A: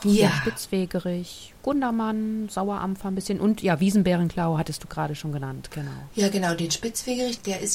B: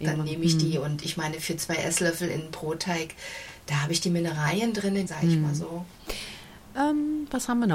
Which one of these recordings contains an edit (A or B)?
B